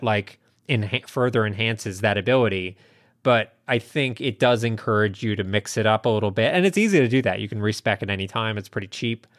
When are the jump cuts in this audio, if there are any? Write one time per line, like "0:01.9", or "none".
none